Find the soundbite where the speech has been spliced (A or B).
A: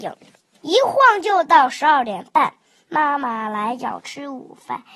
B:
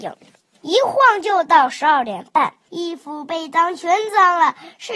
B